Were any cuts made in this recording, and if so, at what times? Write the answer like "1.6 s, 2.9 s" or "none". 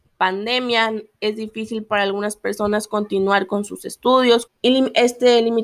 4.5 s